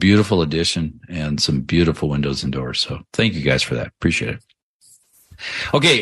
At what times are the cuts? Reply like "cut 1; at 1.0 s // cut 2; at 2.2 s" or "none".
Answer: none

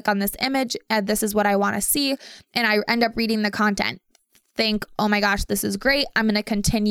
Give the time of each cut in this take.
none

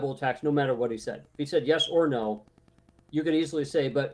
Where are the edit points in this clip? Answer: none

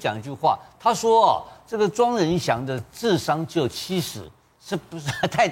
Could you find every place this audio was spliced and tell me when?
none

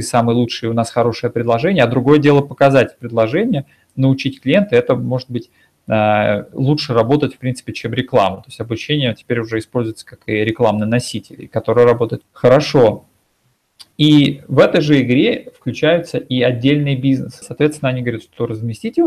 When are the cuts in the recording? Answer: cut 1; at 12.2 s // cut 2; at 17.4 s

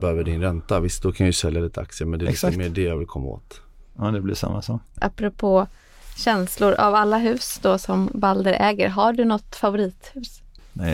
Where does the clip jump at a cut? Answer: cut 1; at 4.9 s

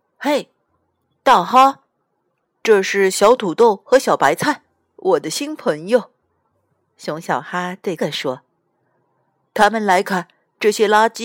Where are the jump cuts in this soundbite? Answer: cut 1; at 8.0 s // cut 2; at 10.0 s

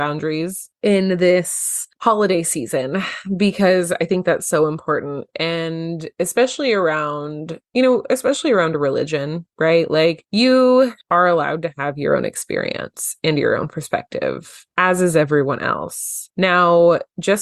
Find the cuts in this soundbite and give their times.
cut 1; at 5.3 s

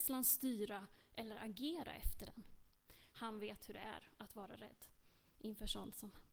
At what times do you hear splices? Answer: cut 1; at 3.1 s

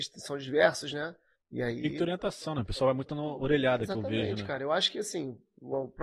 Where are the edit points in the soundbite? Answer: cut 1; at 1.4 s

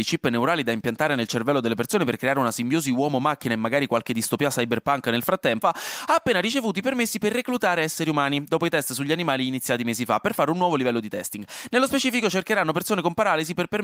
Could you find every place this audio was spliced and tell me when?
cut 1; at 5.6 s

